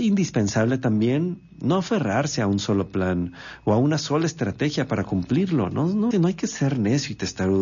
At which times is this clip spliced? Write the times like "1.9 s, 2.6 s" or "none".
6.1 s